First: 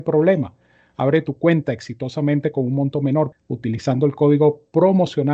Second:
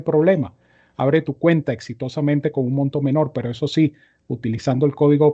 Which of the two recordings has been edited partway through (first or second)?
first